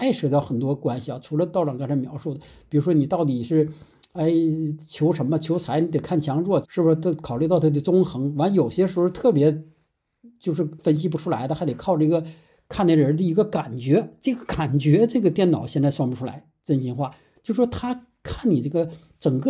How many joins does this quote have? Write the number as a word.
one